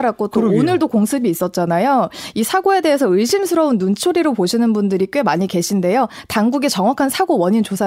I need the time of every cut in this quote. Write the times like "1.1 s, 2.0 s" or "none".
none